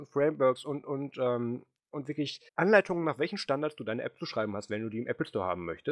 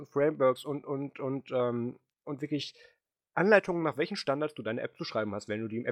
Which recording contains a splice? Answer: first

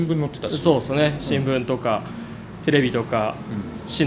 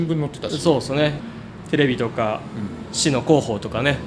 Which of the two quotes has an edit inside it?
second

